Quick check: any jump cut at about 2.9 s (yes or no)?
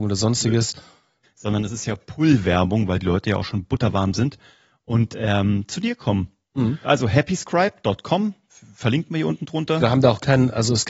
no